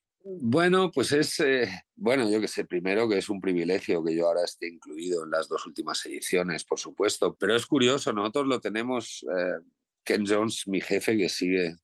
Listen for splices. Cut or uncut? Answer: cut